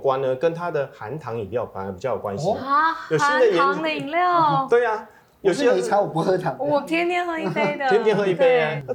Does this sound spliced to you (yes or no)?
no